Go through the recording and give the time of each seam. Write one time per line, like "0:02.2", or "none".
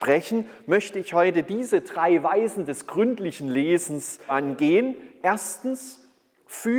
0:04.3